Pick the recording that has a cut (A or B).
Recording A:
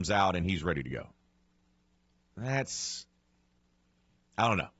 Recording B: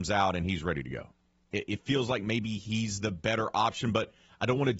B